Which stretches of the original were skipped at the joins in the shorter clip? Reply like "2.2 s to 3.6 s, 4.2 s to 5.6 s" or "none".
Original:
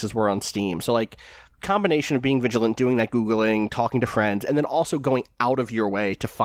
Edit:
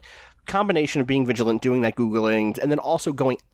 3.7 s to 4.4 s